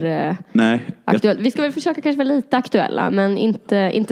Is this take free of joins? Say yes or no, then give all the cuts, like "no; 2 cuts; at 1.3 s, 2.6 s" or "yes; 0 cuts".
yes; 0 cuts